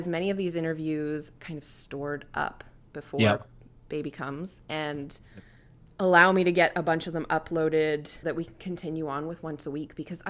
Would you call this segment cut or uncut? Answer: cut